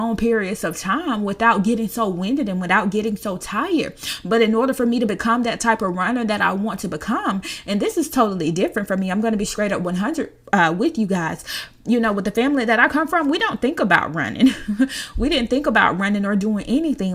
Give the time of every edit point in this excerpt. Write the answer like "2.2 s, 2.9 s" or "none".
none